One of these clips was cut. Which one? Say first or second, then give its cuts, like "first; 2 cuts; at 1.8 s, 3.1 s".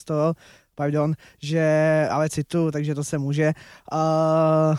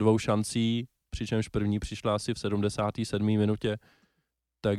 first; 1 cut; at 2.1 s